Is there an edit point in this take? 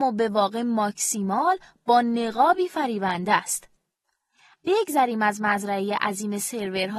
yes; 1 cut; at 4.5 s

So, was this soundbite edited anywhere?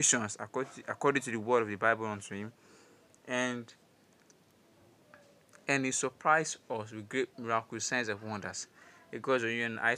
no; 0 cuts

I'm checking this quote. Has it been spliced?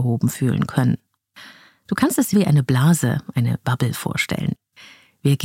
yes; 1 cut; at 2.3 s

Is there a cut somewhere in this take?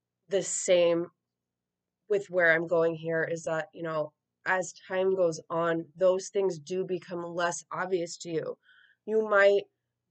no; 0 cuts

